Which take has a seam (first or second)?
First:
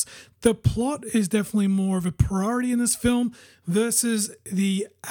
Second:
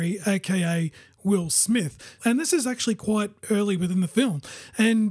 second